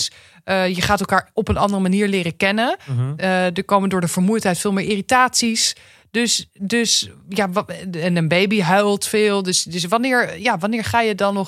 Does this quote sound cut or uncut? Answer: uncut